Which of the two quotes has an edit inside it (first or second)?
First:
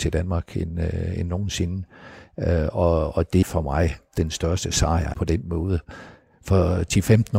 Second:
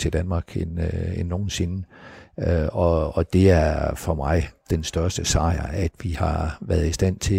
first